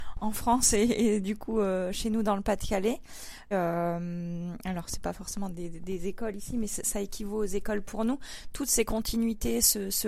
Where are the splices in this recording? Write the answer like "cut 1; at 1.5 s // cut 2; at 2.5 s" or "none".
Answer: cut 1; at 3.5 s // cut 2; at 5.5 s